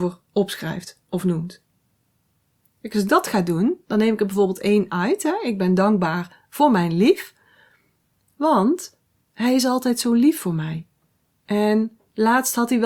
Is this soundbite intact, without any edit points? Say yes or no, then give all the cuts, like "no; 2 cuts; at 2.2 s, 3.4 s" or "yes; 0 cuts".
yes; 0 cuts